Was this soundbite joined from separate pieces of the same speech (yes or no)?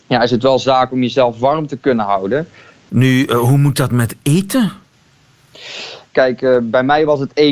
yes